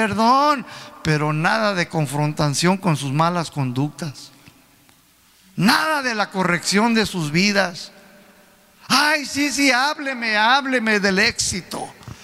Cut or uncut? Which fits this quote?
uncut